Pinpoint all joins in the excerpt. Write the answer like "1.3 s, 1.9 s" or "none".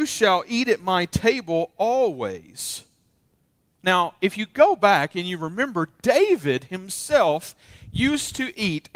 none

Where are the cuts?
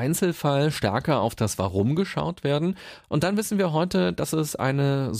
3.0 s

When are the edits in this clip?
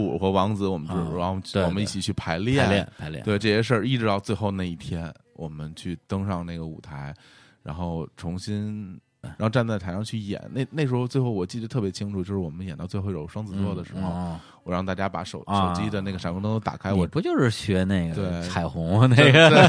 9.2 s

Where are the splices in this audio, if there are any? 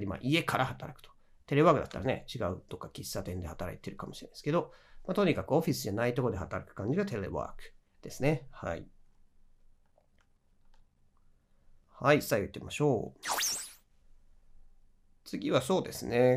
none

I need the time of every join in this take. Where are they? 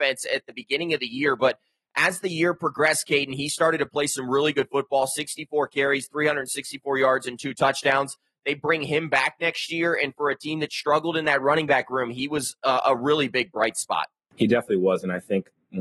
none

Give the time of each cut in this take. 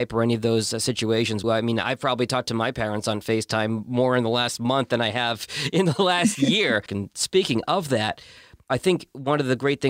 1.4 s, 6.9 s

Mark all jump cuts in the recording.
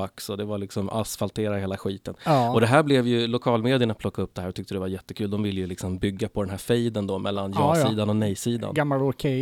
none

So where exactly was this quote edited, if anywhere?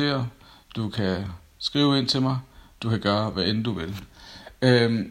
none

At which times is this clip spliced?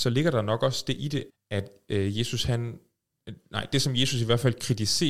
1.3 s

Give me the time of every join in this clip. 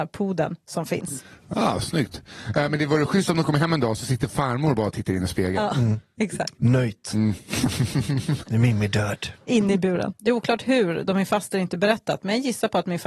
8.4 s, 10.1 s

